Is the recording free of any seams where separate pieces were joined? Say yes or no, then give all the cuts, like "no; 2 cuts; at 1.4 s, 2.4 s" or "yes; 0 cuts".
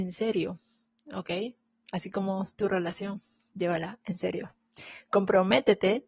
yes; 0 cuts